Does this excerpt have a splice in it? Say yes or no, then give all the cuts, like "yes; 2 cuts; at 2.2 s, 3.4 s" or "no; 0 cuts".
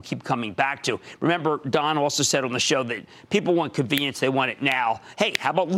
no; 0 cuts